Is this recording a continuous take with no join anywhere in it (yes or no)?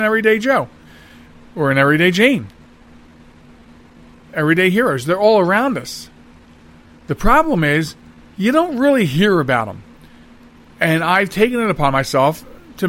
yes